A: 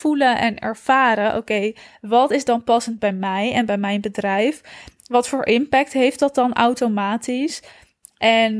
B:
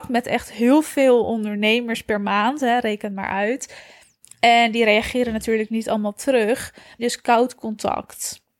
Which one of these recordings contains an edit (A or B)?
B